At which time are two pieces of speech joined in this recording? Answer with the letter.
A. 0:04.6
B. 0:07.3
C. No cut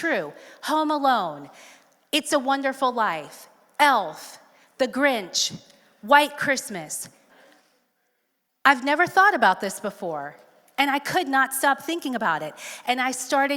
B